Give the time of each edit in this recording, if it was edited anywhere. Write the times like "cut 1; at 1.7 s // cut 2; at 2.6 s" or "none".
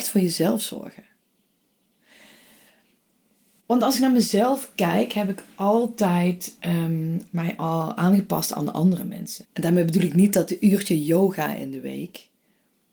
cut 1; at 7.3 s // cut 2; at 9.4 s